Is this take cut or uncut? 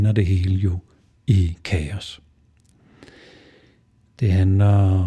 uncut